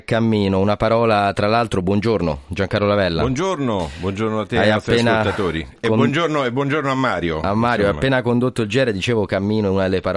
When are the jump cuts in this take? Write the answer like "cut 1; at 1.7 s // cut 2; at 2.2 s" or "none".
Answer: none